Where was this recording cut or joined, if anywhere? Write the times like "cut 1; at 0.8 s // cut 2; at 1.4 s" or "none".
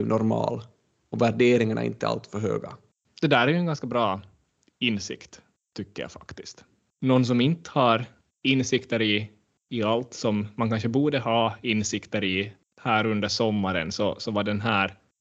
none